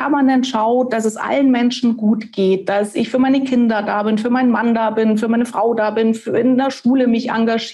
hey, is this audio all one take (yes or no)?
yes